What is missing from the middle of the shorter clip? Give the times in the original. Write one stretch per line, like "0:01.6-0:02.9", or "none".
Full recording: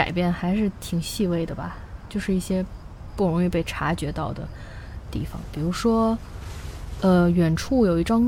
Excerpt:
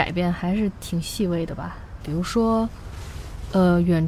0:02.0-0:05.5

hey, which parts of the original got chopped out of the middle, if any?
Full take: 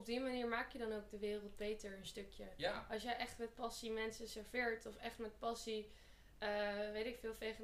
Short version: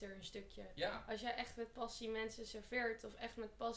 none

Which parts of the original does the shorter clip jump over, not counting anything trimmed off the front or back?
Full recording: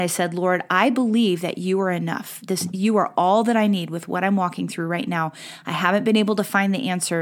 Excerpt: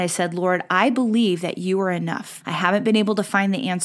0:02.4-0:05.6

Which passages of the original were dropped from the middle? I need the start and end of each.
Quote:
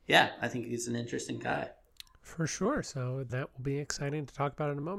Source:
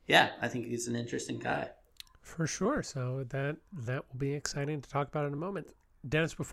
0:03.3-0:03.8

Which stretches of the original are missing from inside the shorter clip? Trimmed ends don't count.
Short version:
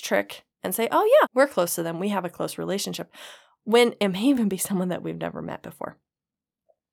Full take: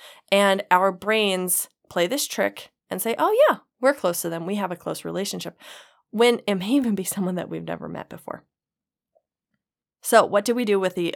0:03.5-0:03.7

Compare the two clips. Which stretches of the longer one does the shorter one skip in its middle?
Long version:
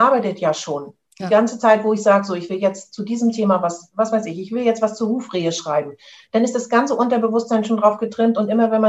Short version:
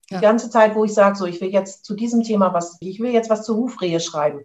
0:03.9-0:04.3

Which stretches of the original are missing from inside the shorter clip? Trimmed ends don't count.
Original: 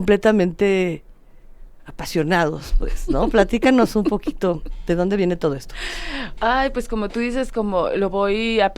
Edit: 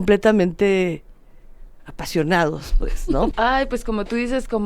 0:03.3-0:06.3

